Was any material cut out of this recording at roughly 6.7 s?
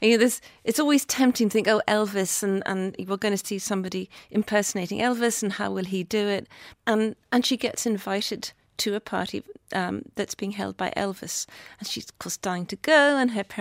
yes; 1 cut; at 6.7 s

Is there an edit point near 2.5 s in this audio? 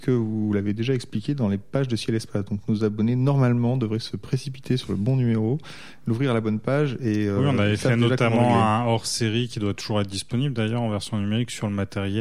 no; 0 cuts

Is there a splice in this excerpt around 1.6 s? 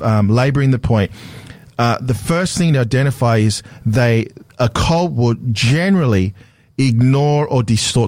no; 0 cuts

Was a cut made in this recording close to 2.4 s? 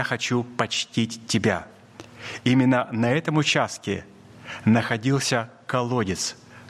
yes; 1 cut; at 2.4 s

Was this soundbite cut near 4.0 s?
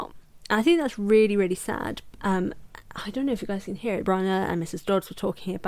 yes; 2 cuts; at 2.1 s, 4.0 s

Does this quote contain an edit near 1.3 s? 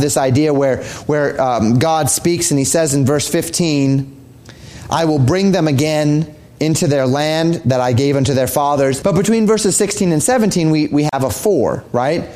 no; 1 cut; at 9.0 s

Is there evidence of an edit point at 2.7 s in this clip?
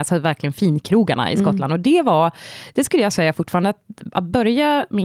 no; 0 cuts

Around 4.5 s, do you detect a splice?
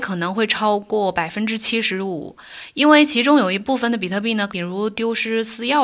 yes; 1 cut; at 4.5 s

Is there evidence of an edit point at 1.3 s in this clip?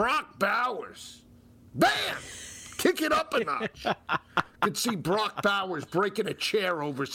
no; 0 cuts

